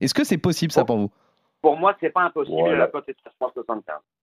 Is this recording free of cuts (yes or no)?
yes